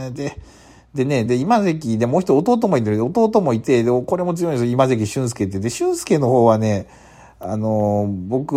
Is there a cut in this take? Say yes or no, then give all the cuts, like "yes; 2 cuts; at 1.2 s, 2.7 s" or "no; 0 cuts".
yes; 1 cut; at 1.3 s